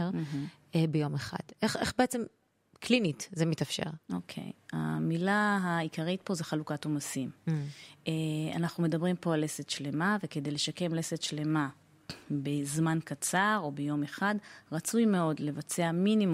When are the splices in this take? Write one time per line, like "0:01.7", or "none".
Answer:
none